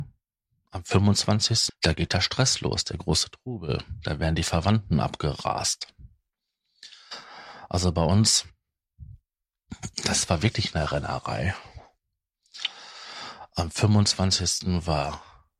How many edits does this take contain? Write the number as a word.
one